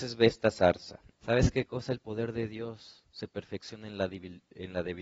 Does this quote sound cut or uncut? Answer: cut